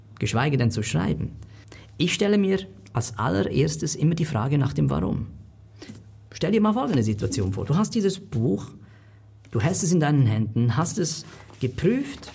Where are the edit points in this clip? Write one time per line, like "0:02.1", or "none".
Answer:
none